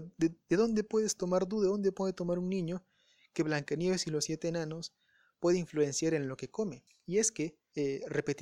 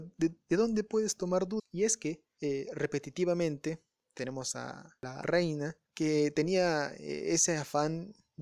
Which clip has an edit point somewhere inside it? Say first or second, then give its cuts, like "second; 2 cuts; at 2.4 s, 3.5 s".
second; 2 cuts; at 1.6 s, 5.2 s